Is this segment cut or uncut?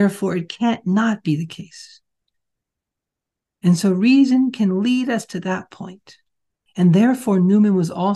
cut